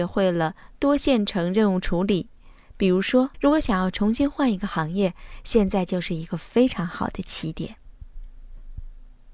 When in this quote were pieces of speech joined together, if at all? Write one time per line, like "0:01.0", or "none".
0:03.3